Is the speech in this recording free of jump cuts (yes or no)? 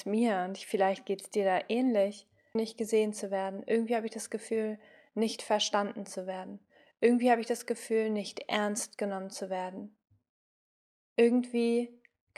no